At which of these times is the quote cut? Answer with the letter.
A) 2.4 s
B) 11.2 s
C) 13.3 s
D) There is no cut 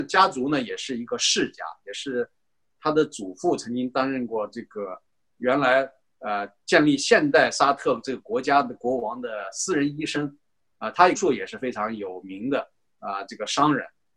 B